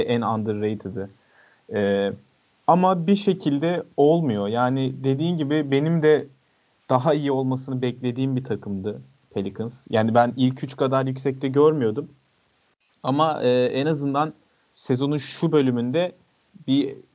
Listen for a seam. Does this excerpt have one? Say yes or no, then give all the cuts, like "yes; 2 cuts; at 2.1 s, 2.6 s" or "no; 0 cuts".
no; 0 cuts